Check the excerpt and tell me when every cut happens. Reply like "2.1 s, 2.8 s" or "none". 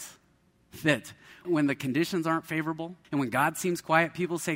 1.4 s, 3.0 s